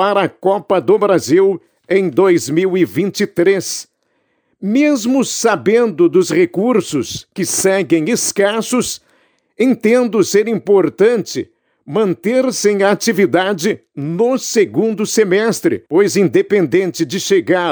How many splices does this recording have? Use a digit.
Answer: 1